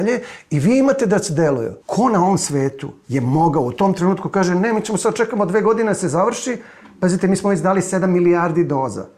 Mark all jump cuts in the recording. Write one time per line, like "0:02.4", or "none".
0:01.8